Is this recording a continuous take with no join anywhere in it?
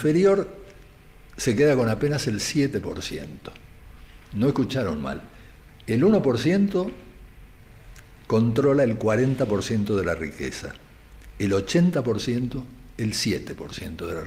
yes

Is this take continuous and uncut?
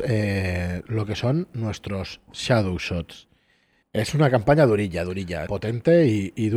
no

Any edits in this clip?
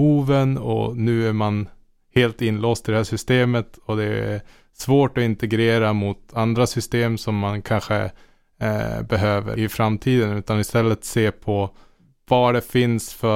yes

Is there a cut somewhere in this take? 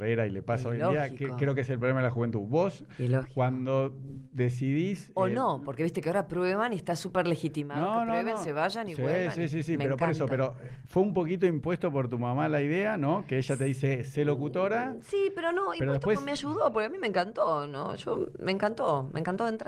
no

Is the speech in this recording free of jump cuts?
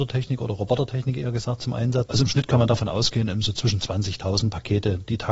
no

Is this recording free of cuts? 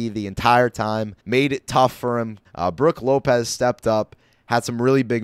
no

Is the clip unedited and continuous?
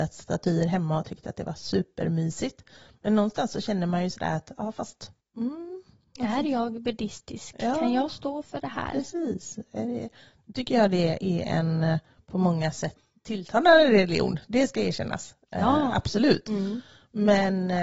yes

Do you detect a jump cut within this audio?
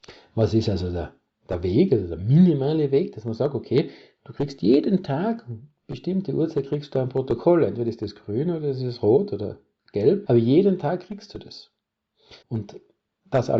yes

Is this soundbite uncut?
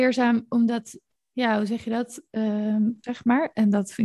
no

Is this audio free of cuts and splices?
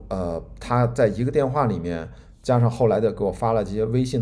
yes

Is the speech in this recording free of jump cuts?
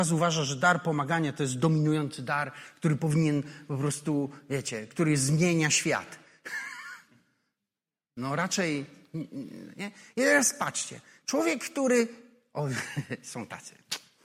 yes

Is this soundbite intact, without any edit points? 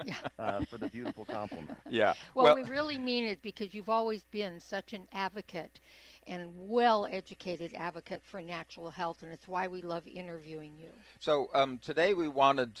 yes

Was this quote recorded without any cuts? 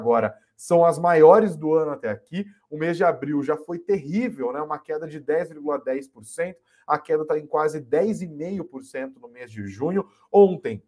yes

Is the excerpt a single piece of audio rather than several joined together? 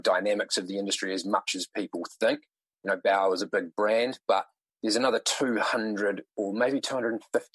yes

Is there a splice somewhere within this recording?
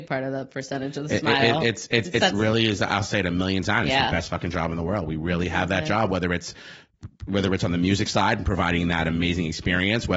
no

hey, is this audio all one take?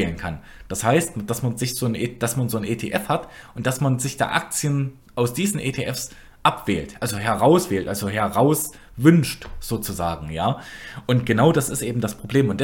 yes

